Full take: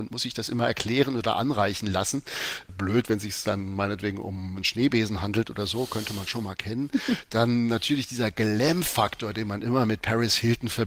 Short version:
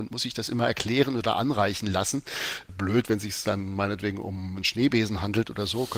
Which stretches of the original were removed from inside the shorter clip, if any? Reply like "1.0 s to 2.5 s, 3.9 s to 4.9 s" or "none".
none